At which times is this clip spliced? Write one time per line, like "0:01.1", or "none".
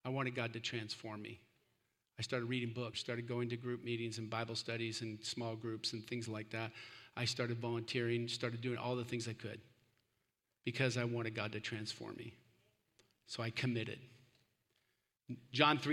0:02.9